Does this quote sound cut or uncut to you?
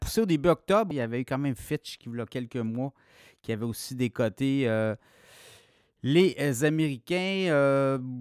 cut